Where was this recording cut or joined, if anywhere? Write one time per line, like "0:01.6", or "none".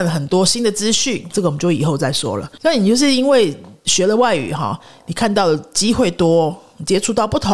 0:01.3